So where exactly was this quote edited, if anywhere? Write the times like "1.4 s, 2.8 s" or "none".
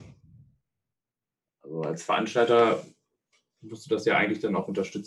1.5 s